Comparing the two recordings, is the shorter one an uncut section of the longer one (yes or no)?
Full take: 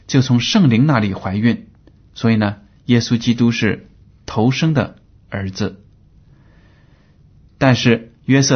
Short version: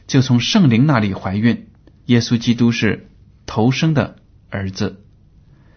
no